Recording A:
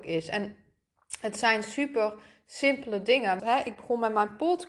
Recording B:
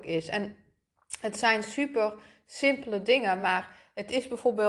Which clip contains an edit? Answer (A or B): A